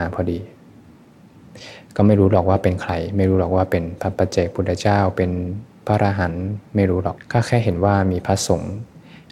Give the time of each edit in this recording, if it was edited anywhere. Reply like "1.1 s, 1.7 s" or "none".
7.2 s

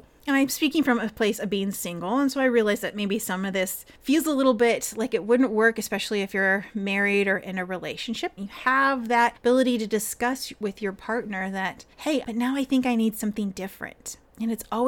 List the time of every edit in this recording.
8.4 s, 12.2 s

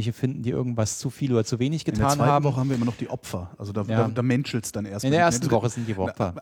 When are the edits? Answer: none

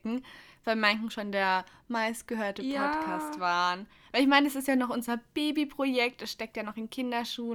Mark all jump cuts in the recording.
none

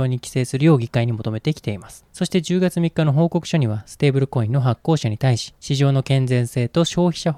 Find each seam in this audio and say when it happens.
none

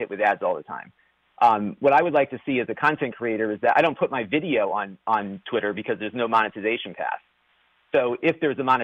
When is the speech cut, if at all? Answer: none

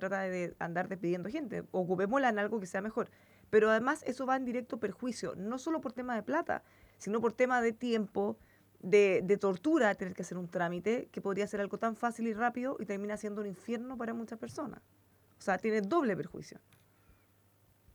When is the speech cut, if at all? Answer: none

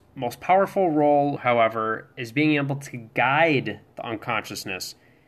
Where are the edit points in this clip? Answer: 1.4 s

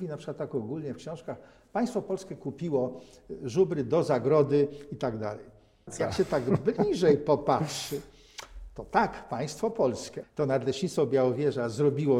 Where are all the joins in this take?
5.9 s, 10.2 s

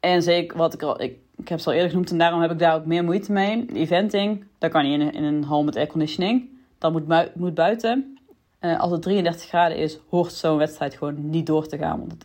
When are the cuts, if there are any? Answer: none

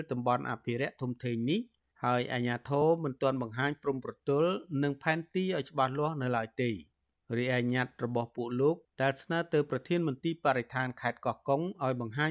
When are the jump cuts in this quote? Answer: none

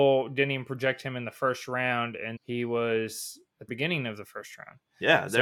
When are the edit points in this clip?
2.4 s, 3.7 s

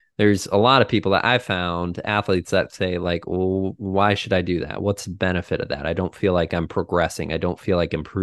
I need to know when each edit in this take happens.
none

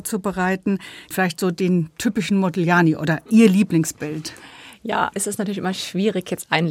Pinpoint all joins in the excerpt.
1.1 s, 5.1 s

